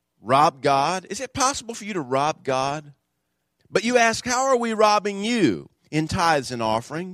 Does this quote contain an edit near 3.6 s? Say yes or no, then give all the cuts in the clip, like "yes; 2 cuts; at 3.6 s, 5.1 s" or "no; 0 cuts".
yes; 1 cut; at 3.6 s